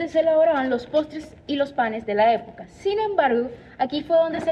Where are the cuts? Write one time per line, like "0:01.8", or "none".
none